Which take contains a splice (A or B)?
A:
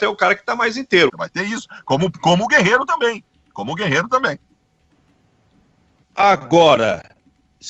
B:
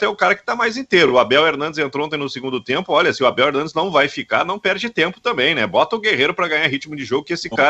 A